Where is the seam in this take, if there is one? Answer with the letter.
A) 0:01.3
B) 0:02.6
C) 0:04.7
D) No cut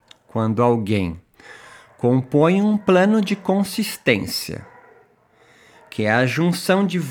D